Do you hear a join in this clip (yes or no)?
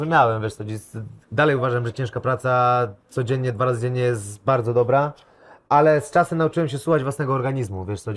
yes